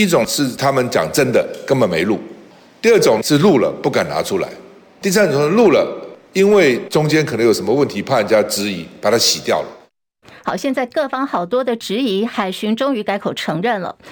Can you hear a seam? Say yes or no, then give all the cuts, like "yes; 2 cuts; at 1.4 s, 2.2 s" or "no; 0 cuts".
no; 0 cuts